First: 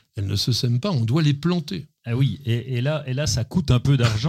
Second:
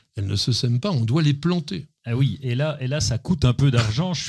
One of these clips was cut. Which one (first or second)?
second